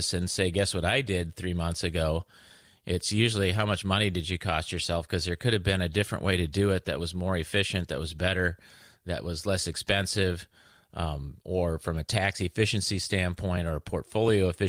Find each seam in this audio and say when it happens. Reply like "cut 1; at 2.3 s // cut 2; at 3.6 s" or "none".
none